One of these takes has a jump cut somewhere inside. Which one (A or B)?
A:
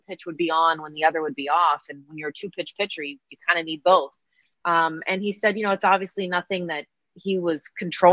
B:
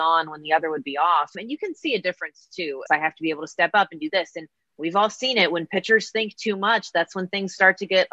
B